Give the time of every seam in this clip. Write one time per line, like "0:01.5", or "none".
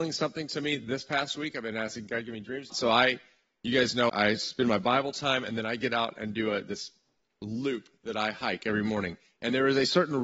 0:02.7
0:04.1